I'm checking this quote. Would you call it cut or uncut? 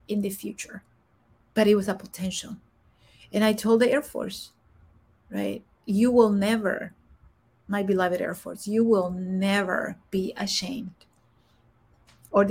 cut